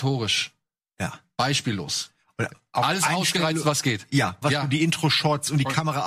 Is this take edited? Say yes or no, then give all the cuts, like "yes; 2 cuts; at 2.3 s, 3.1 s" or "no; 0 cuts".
yes; 1 cut; at 4.4 s